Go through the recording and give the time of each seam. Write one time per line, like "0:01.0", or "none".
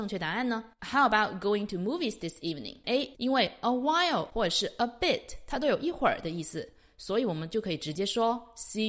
0:03.1